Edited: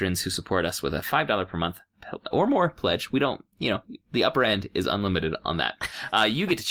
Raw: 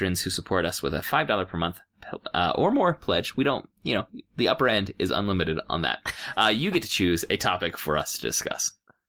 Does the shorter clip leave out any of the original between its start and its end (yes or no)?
yes